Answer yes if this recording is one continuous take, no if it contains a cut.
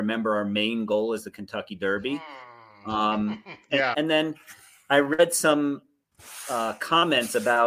no